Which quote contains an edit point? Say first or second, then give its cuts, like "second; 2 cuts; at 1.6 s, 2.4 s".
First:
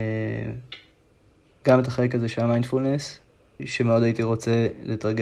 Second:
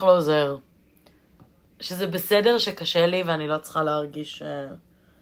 first; 1 cut; at 1.5 s